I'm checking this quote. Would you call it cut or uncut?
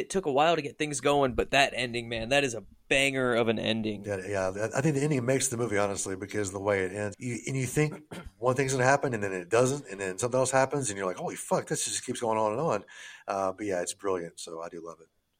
cut